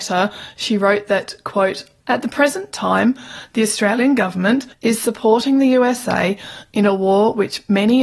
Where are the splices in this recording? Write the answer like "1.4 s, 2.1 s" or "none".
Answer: none